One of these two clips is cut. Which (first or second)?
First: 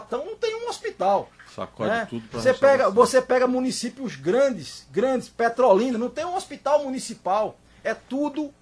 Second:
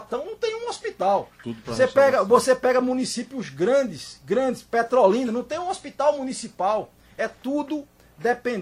second